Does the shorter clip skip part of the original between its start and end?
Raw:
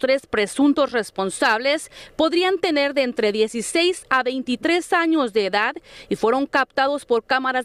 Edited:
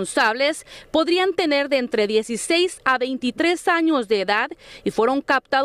no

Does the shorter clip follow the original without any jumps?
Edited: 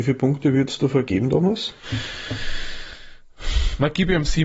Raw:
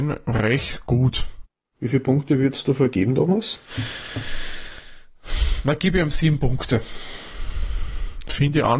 yes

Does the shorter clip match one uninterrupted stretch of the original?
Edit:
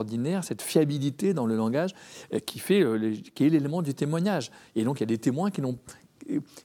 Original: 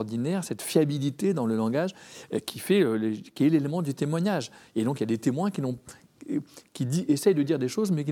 yes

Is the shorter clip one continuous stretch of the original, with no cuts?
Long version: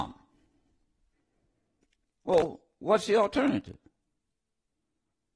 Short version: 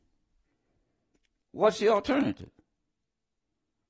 no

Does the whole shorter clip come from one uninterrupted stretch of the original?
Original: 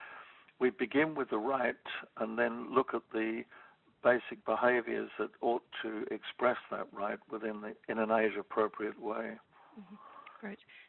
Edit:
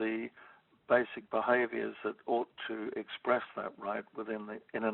yes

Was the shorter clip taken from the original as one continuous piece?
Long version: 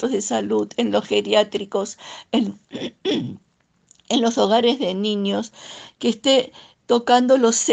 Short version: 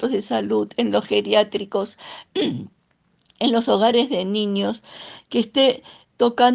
no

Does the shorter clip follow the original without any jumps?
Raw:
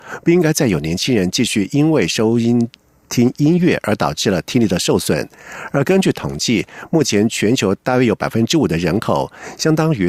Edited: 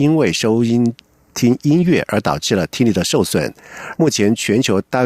no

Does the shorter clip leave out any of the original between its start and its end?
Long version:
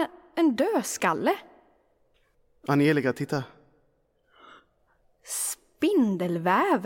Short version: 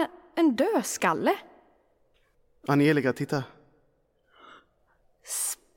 no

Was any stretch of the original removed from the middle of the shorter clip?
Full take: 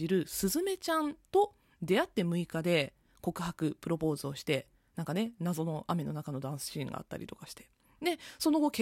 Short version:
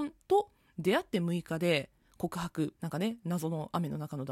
yes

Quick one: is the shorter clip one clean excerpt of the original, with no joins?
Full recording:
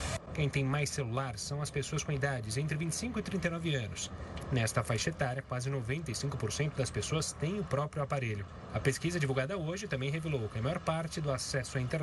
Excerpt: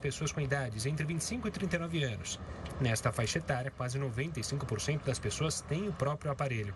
yes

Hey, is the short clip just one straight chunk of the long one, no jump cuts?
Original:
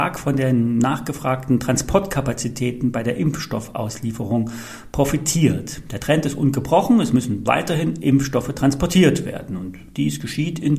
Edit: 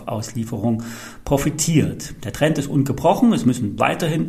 yes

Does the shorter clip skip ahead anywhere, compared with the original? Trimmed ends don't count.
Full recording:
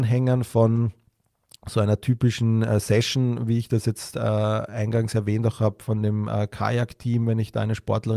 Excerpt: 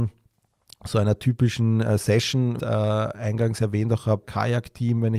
yes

